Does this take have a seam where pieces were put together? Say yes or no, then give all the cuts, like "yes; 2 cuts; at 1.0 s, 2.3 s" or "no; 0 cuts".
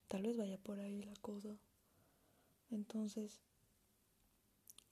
no; 0 cuts